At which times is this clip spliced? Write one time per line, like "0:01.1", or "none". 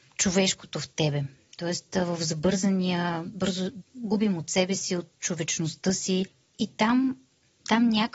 0:03.8